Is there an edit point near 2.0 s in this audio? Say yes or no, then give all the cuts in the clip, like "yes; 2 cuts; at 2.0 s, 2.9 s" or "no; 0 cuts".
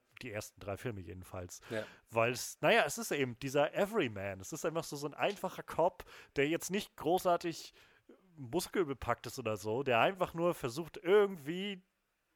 no; 0 cuts